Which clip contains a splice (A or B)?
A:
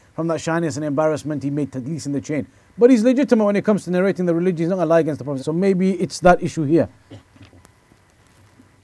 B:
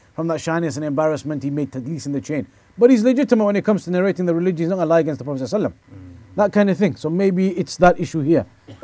A